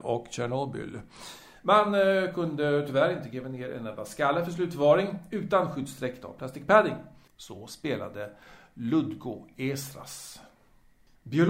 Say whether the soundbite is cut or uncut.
cut